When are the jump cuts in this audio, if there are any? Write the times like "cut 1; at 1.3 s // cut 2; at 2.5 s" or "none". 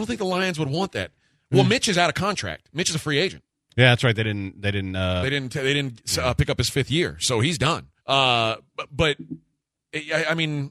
cut 1; at 8.0 s